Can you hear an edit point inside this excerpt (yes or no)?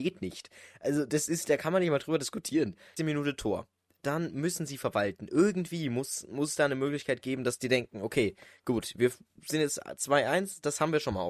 yes